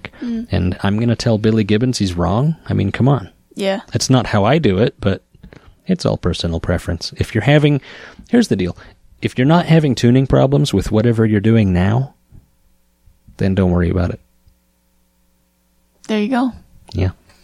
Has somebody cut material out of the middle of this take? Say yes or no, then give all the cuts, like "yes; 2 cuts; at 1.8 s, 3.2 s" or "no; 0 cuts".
no; 0 cuts